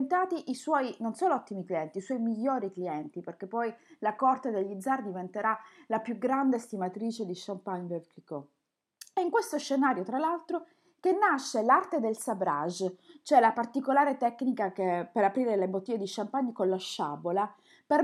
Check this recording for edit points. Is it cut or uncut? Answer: uncut